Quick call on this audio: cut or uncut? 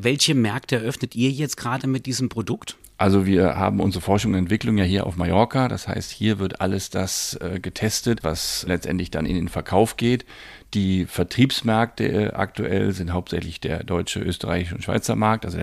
uncut